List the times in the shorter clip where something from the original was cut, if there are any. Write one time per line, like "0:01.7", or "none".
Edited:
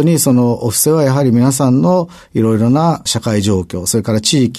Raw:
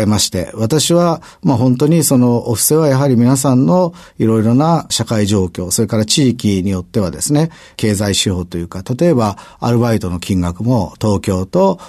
none